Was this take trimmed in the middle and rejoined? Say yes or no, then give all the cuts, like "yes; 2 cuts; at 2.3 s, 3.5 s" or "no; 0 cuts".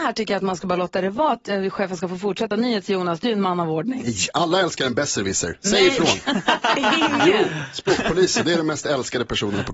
no; 0 cuts